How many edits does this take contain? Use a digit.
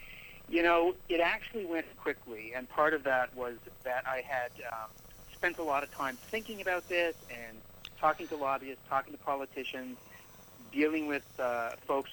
1